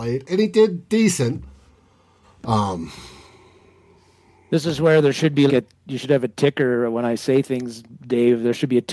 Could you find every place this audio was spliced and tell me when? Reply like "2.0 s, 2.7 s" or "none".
2.2 s, 5.5 s